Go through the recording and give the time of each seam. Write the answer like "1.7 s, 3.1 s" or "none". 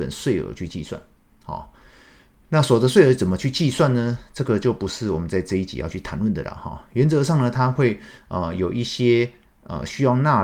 none